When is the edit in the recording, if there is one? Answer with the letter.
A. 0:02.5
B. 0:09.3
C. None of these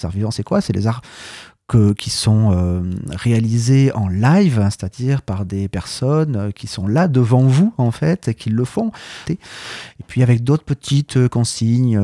B